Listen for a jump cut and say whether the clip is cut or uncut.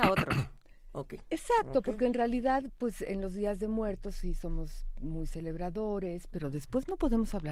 uncut